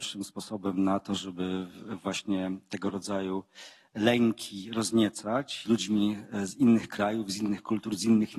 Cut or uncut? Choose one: cut